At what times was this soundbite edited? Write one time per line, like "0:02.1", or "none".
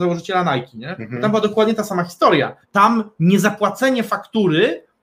0:02.6